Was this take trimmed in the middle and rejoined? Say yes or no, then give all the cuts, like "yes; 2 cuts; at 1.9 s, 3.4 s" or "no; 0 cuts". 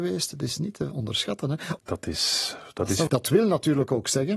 yes; 2 cuts; at 1.8 s, 3.1 s